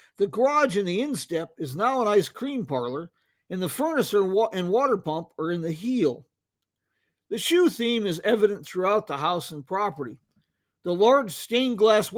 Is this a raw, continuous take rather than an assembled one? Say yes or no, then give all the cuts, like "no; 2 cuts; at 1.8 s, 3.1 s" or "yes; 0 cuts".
yes; 0 cuts